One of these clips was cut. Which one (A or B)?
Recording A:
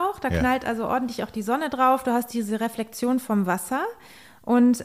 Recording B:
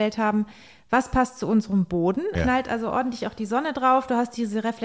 B